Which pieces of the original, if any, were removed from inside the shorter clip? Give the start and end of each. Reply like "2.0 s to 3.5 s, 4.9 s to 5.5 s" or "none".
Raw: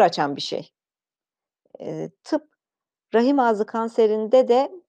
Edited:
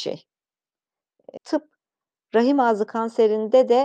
1.8 s to 2.2 s

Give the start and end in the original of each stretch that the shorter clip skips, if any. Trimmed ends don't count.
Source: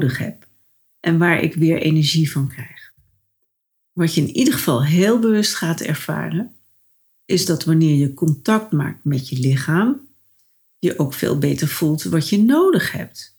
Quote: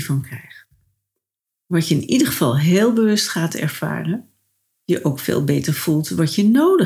7.0 s to 10.6 s

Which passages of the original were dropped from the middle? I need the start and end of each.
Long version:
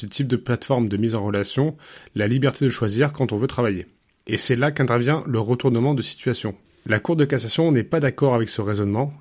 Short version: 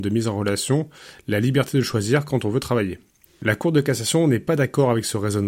4.1 s to 6.7 s

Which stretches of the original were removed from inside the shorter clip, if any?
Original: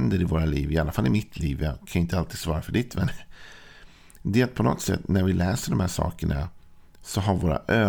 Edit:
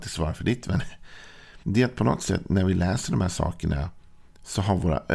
3.9 s to 4.2 s

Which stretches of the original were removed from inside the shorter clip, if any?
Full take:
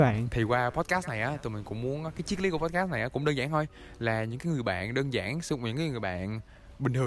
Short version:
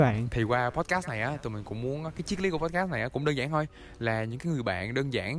none

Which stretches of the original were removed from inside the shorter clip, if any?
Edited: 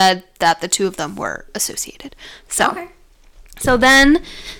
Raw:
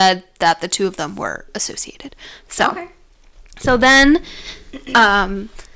none

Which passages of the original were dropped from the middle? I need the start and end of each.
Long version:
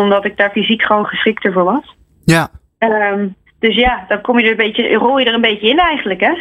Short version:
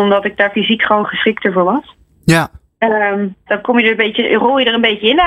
3.5 s to 4.1 s

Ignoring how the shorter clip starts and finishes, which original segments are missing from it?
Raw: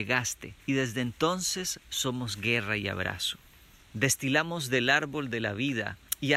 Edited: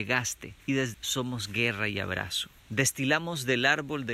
0.9 s to 1.8 s, 3.5 s to 3.8 s

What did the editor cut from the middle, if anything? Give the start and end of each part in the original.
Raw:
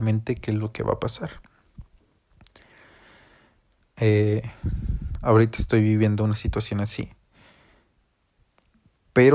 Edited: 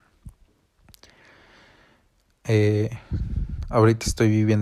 none

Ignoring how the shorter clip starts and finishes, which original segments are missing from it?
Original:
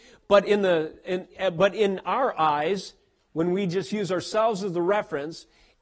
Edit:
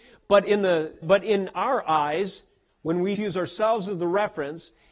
1.0 s to 1.5 s, 3.7 s to 3.9 s

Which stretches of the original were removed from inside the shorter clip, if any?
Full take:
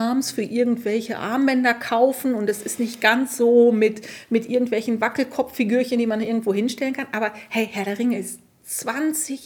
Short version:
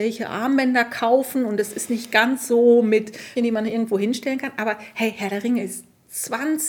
4.3 s to 5.9 s

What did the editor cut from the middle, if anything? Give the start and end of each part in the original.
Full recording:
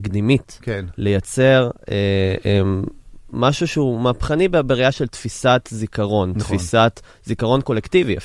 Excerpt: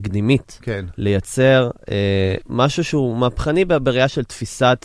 2.4 s to 3.2 s

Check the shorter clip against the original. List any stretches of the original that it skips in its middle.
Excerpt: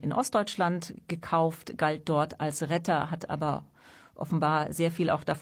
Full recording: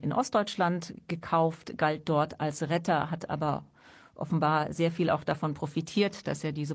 none

